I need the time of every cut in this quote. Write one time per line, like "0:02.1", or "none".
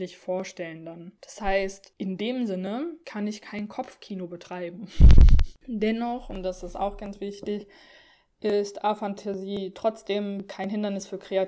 none